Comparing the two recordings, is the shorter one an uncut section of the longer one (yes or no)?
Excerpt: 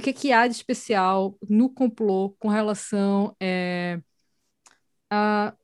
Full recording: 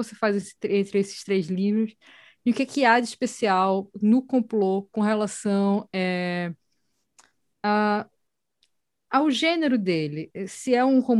yes